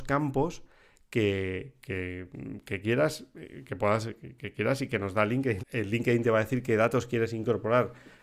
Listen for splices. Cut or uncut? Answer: cut